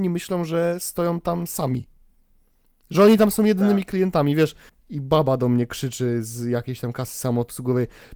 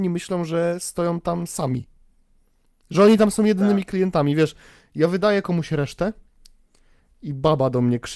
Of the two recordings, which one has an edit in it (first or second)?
first